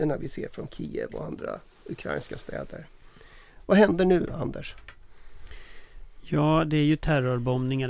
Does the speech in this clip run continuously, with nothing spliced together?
yes; 0 cuts

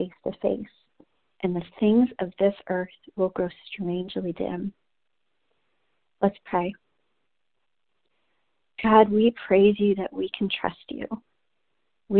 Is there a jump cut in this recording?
no; 0 cuts

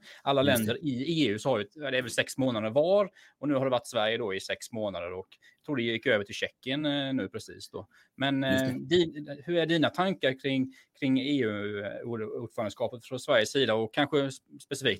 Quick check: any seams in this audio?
no; 0 cuts

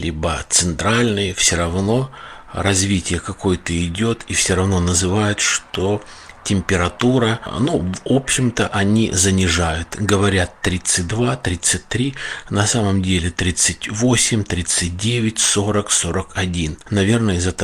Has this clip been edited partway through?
no; 0 cuts

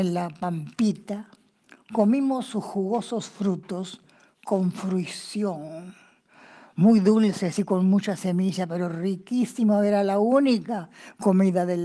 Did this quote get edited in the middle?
no; 0 cuts

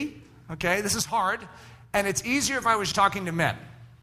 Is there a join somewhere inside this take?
yes; 1 cut; at 2.9 s

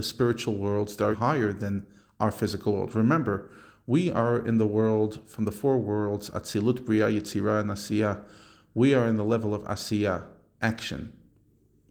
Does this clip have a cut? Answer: yes; 1 cut; at 1.1 s

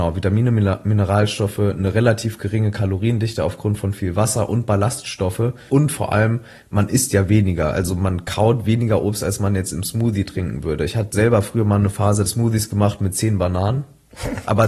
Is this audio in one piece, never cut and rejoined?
no; 2 cuts; at 5.7 s, 12.2 s

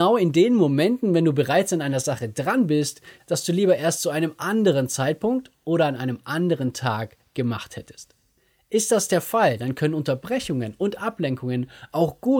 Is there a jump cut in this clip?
yes; 1 cut; at 3.2 s

